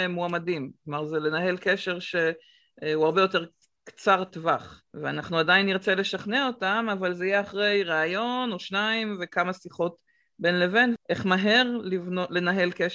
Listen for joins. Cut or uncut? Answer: cut